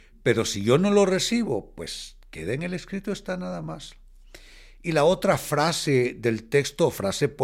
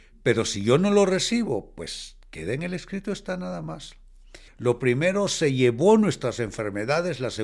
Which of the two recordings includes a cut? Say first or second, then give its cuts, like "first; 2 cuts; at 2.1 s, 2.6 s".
second; 1 cut; at 4.5 s